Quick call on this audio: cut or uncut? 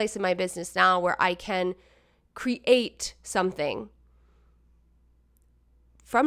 uncut